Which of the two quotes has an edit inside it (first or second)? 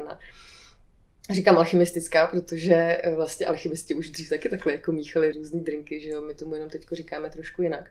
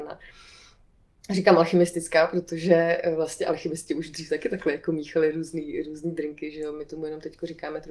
first